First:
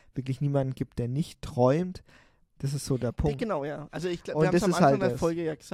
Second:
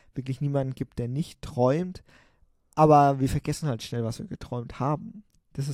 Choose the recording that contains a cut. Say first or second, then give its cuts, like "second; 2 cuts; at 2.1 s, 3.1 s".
first; 1 cut; at 2.4 s